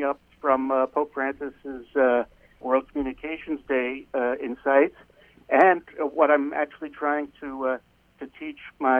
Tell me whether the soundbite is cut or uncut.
cut